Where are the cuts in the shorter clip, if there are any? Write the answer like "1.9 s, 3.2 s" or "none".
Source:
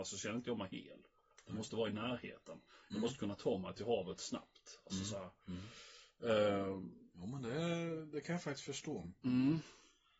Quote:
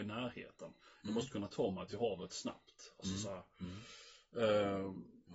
none